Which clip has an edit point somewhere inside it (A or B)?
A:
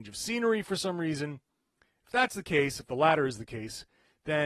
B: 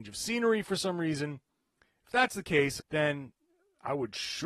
B